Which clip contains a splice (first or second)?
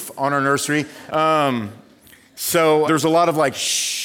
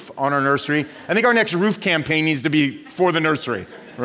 first